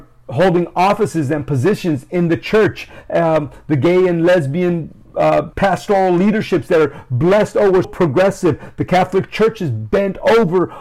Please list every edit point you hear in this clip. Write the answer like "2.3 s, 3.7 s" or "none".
5.5 s, 7.8 s